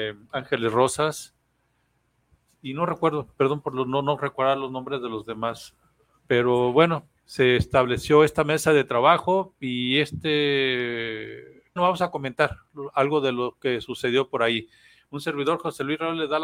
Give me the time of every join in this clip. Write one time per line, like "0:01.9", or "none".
0:07.2
0:11.8